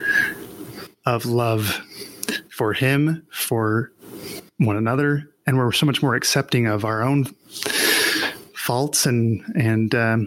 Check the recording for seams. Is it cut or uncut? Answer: uncut